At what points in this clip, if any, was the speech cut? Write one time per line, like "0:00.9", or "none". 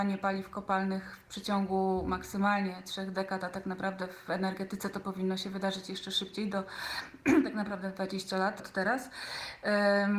0:08.6